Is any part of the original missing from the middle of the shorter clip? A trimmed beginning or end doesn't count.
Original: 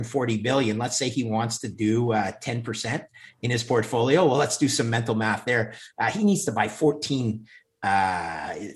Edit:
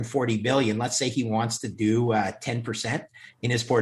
no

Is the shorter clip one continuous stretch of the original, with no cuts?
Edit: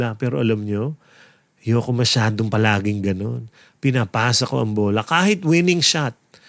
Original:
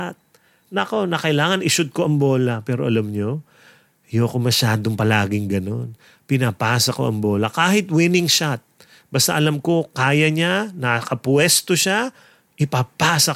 yes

